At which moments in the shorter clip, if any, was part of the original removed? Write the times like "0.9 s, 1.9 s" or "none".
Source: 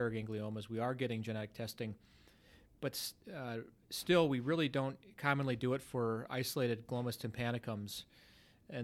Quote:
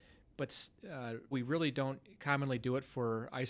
1.3 s